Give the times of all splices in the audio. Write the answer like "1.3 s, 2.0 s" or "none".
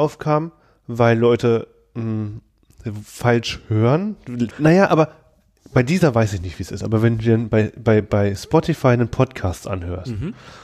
4.5 s